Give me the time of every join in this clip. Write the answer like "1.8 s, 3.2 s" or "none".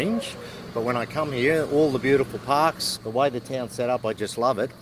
3.0 s